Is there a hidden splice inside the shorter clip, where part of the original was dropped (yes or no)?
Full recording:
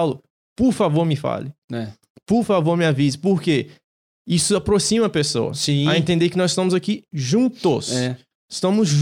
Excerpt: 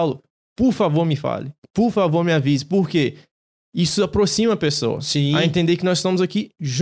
yes